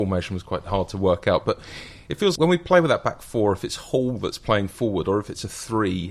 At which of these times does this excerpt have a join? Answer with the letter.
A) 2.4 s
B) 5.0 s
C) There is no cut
A